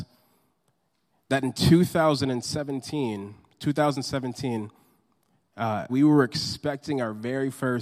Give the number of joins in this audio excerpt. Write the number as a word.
one